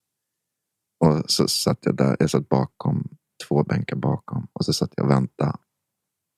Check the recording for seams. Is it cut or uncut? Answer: uncut